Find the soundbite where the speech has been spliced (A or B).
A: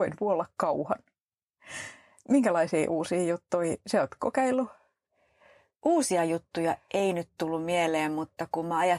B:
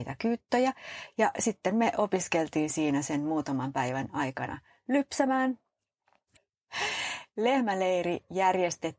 B